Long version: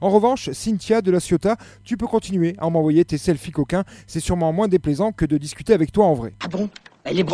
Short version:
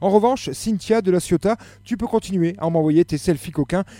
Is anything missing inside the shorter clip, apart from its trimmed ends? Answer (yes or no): no